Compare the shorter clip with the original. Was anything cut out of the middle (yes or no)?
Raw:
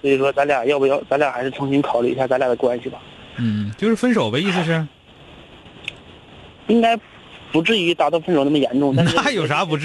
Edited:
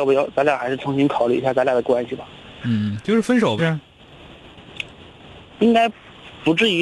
yes